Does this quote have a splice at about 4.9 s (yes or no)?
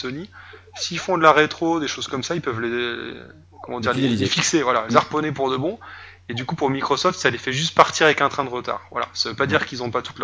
yes